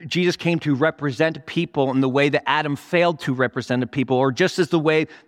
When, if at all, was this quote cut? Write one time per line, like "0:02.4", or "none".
none